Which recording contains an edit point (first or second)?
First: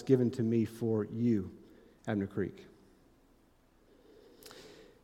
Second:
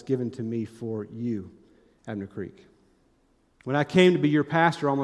second